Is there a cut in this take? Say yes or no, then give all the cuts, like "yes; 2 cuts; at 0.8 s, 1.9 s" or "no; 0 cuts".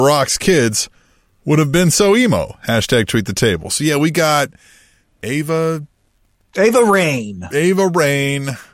no; 0 cuts